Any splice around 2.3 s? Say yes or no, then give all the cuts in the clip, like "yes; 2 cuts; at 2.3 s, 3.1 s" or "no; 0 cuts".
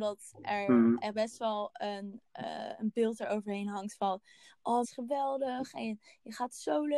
no; 1 cut; at 4.8 s